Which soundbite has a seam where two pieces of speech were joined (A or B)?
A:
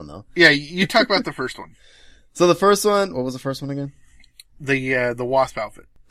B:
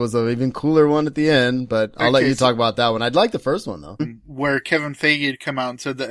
B